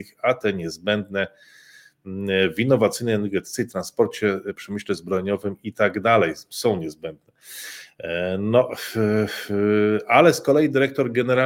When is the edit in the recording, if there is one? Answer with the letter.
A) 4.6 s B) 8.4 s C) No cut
A